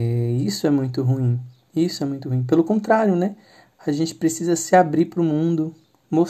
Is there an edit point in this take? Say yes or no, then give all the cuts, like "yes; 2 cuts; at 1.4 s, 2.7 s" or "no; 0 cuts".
no; 0 cuts